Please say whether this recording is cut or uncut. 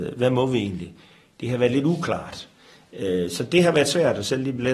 uncut